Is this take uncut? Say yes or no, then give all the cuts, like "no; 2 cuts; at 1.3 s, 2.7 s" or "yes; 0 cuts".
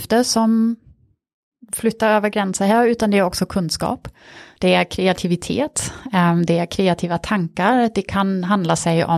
yes; 0 cuts